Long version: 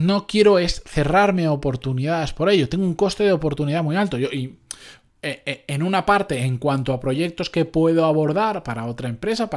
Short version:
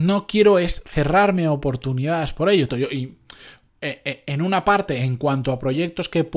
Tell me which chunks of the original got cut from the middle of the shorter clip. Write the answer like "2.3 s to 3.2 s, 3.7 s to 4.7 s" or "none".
2.7 s to 4.1 s